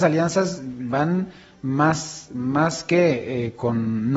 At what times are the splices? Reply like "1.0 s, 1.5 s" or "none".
none